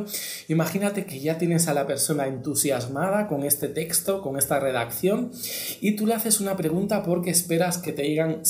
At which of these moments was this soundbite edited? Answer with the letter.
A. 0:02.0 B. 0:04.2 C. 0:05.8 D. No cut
D